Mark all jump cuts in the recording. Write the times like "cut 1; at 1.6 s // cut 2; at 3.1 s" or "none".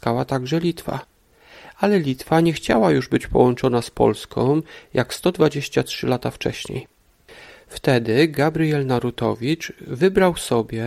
none